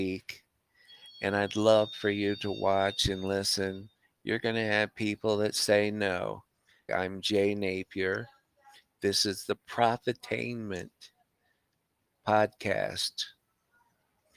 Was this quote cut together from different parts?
yes; 2 cuts; at 4.0 s, 6.9 s

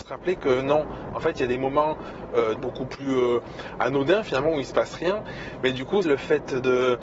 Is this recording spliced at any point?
yes; 2 cuts; at 2.5 s, 6.0 s

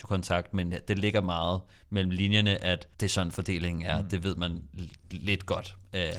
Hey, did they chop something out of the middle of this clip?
yes; 1 cut; at 2.9 s

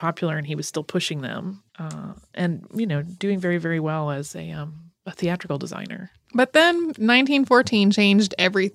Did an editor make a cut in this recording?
yes; 1 cut; at 1.7 s

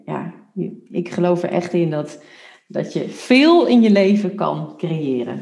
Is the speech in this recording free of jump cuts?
yes; 0 cuts

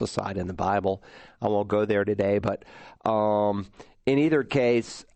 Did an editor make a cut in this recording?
no; 0 cuts

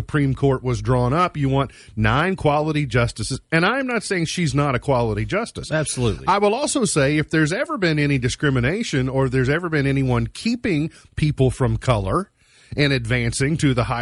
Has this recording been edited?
no; 0 cuts

